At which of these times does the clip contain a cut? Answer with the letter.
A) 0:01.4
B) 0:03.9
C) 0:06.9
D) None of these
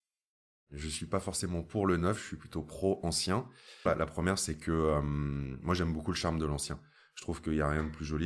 B